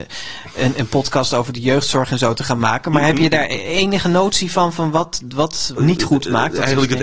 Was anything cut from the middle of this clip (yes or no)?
yes